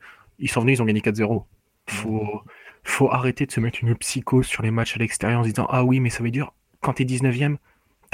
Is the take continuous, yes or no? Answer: no